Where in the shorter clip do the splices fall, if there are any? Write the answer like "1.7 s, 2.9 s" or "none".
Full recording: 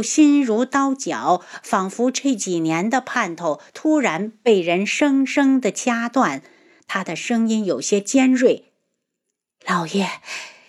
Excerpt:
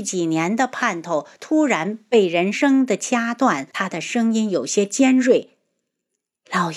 2.5 s, 3.7 s